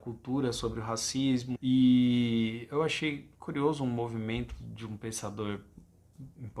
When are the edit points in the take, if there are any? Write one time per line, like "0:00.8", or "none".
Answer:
0:01.6